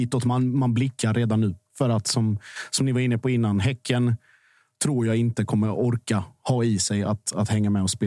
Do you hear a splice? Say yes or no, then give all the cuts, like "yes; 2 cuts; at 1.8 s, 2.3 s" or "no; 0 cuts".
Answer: no; 0 cuts